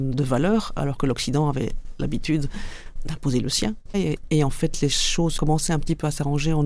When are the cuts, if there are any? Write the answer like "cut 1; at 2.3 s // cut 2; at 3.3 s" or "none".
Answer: cut 1; at 3.9 s